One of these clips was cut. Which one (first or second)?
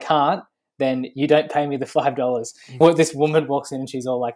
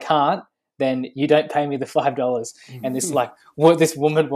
first